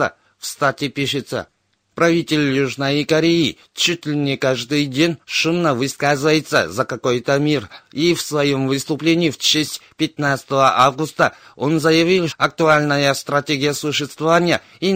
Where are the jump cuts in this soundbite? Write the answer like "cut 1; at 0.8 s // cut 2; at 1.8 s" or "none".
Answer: cut 1; at 12.3 s